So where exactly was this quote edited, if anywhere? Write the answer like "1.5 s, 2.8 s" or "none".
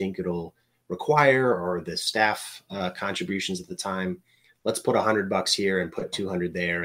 none